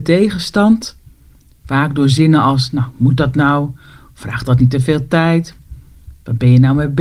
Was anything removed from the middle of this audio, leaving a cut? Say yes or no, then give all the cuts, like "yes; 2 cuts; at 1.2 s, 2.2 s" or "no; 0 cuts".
no; 0 cuts